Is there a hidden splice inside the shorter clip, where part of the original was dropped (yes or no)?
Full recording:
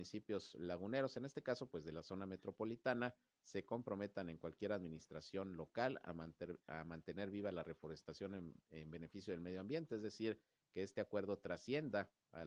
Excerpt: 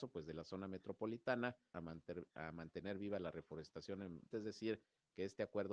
yes